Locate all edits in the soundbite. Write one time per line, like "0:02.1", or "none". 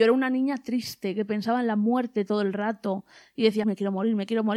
0:03.6